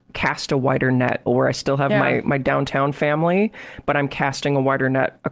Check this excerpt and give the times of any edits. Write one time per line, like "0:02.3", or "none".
0:01.3